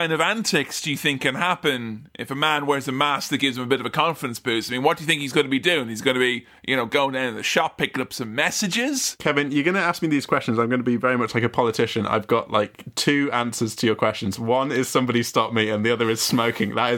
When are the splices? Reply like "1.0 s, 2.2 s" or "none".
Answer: none